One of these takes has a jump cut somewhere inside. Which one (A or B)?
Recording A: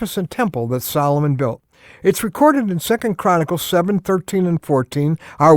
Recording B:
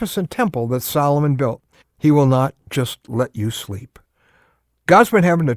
B